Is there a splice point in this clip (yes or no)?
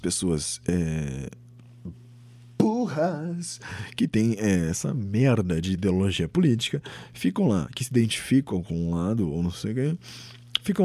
no